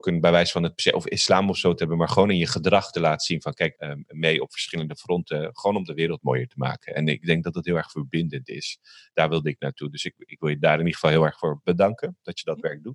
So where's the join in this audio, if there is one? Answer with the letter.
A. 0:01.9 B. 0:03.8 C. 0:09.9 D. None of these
B